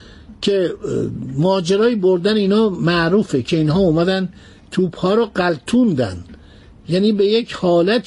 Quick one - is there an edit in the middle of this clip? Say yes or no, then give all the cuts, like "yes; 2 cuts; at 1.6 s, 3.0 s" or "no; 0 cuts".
no; 0 cuts